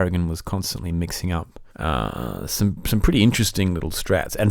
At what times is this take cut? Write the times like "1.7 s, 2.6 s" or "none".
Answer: 1.7 s